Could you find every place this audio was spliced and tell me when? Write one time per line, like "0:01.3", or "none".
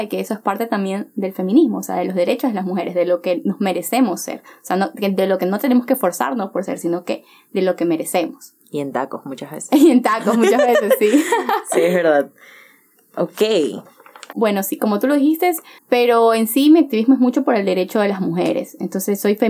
0:08.6
0:14.3
0:15.8